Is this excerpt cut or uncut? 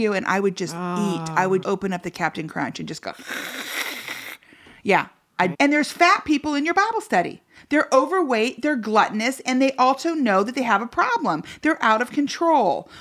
cut